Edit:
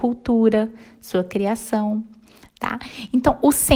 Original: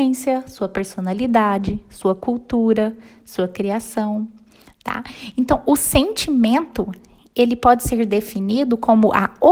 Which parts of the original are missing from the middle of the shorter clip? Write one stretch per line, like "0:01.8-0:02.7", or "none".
none

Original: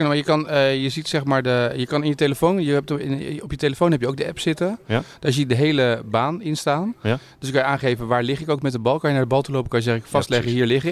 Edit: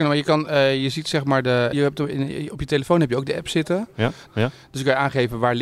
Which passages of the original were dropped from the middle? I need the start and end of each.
0:01.7-0:02.6
0:05.2-0:06.9

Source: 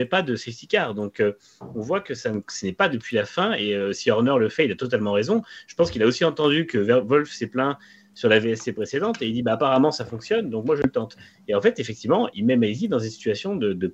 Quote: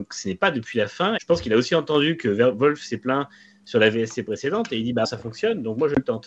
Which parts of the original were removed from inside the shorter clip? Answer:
0:03.5-0:05.7
0:09.5-0:09.9

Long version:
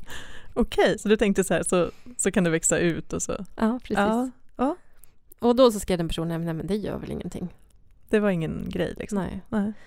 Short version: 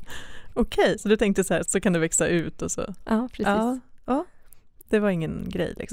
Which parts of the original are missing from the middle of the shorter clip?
0:01.6-0:02.2
0:05.4-0:08.1

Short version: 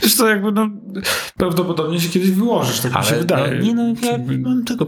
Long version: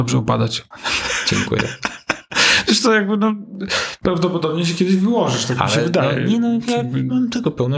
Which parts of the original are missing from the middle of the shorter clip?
none

